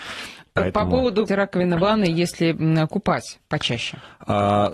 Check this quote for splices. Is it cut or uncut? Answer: cut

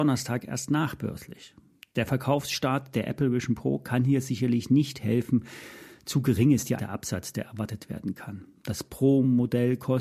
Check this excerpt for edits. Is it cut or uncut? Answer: cut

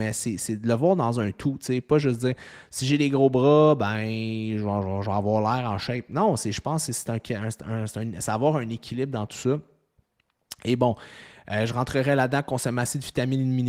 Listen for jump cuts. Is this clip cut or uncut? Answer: uncut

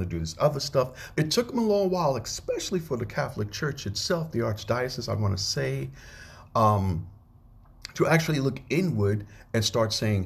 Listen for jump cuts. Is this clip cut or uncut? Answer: cut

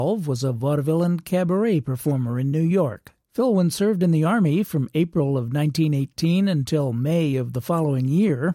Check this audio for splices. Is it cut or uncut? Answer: cut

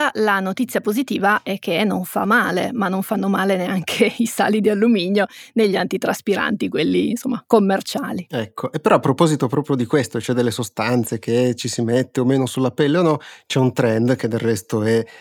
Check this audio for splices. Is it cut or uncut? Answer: uncut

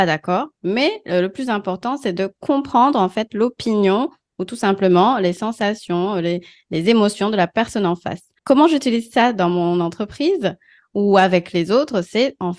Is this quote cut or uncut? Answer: cut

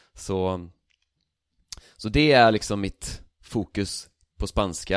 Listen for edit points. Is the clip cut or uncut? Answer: uncut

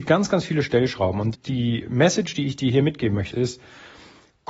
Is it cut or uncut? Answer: cut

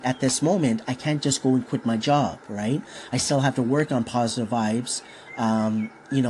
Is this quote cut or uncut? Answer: uncut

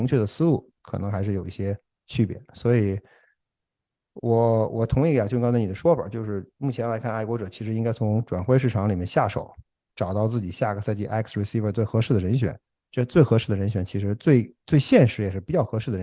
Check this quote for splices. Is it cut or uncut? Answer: uncut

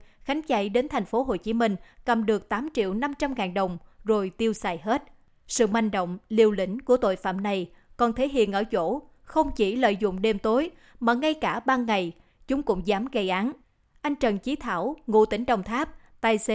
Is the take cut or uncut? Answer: uncut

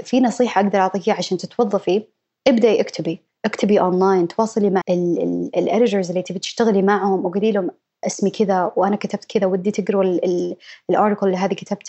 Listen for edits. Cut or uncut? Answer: cut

